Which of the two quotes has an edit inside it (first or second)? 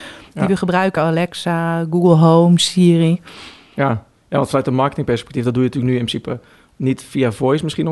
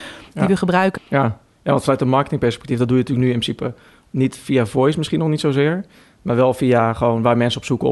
second